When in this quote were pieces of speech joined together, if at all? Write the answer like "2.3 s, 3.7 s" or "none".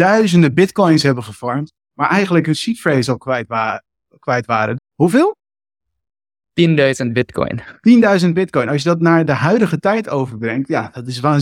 4.8 s